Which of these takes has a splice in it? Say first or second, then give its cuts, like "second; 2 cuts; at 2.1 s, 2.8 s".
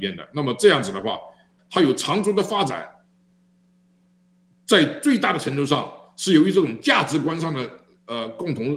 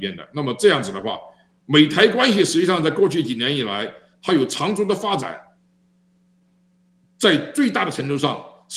first; 1 cut; at 1.6 s